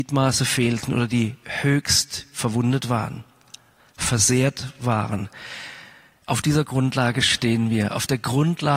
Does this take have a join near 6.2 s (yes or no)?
yes